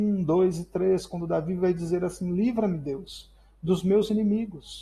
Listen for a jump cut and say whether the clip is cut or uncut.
uncut